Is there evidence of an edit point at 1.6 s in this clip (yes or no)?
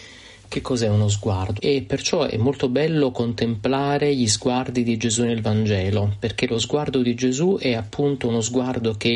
yes